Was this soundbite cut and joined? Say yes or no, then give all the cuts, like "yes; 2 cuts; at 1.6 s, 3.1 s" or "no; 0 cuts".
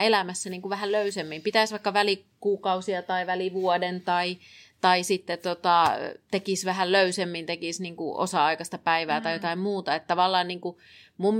no; 0 cuts